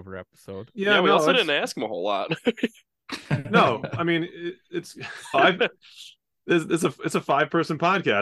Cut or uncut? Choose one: cut